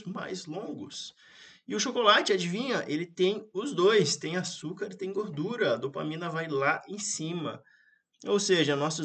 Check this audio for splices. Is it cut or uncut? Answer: uncut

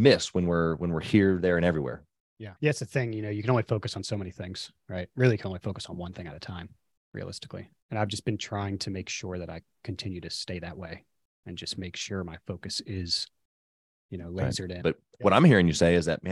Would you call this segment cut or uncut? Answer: cut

